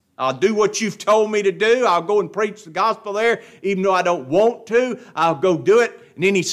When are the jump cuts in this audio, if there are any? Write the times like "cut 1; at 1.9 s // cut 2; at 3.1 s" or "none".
none